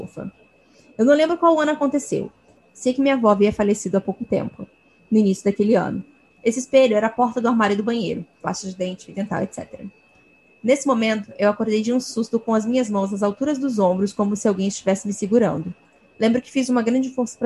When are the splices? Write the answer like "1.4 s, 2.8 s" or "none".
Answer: 6.3 s, 8.4 s, 10.5 s